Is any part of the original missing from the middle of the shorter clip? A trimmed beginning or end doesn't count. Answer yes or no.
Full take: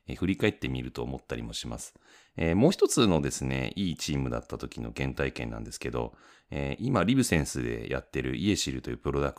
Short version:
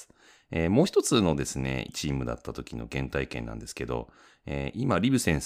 yes